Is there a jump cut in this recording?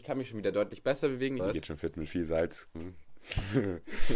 yes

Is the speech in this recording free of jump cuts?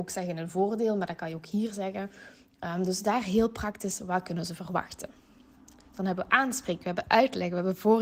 yes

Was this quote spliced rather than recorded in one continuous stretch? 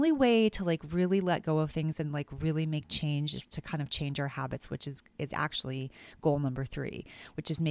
no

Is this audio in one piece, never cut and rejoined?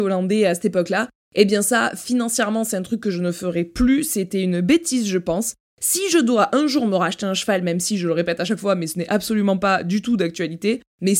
yes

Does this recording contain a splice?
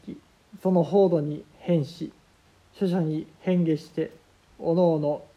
no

